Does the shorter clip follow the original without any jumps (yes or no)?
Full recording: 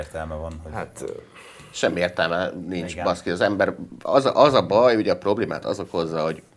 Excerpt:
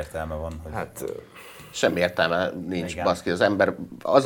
yes